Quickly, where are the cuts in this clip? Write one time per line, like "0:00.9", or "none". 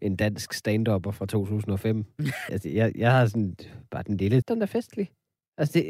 0:02.5
0:04.4

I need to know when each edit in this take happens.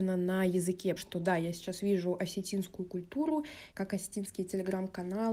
0:01.0
0:03.7

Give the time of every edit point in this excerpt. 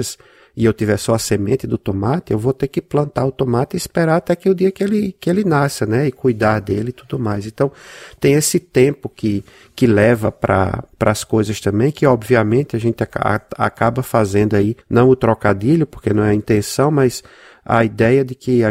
0:10.9
0:14.8

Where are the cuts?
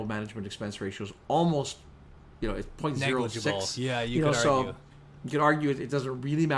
none

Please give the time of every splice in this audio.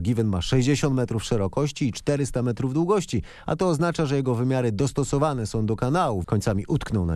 0:06.2

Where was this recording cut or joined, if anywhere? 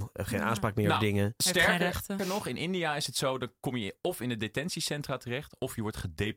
0:02.2

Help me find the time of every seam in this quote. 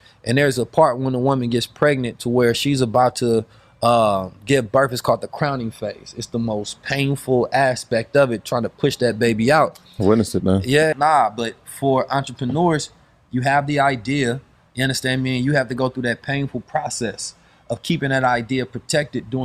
0:10.9

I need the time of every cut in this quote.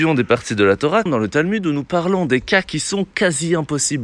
0:01.1

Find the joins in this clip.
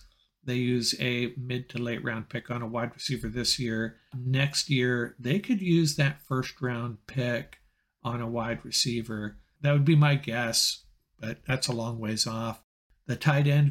none

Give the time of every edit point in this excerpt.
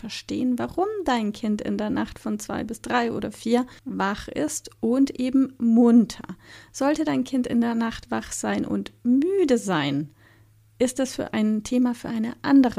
0:03.8

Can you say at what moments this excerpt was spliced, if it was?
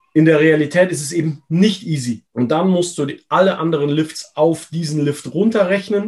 0:02.3

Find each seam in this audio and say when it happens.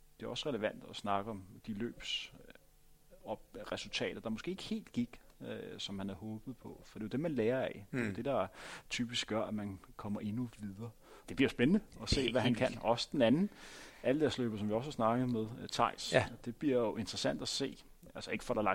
0:11.2

